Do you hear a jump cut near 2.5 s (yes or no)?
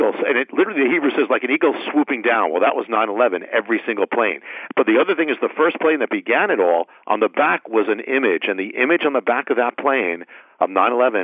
no